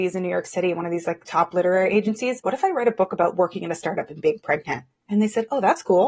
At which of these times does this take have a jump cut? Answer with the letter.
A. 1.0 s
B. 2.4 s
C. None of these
B